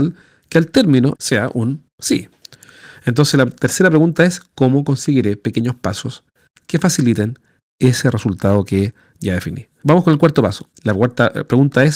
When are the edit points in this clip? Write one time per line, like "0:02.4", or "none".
0:01.2